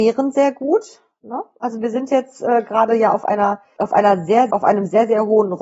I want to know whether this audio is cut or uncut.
cut